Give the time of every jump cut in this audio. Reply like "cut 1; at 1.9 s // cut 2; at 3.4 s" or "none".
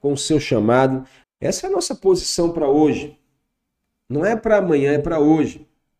cut 1; at 1.2 s